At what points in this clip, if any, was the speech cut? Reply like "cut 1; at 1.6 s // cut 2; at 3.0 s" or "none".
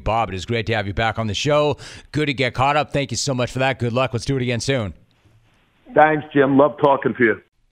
none